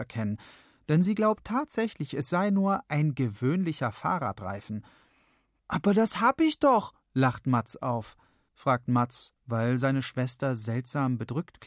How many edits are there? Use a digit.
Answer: 2